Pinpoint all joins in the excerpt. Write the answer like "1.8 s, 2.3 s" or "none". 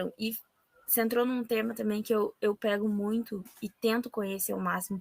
3.5 s